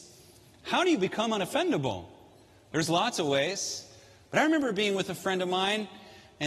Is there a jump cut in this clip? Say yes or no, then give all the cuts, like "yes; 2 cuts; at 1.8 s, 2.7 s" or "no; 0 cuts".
no; 0 cuts